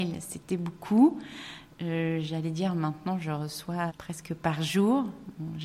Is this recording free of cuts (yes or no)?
no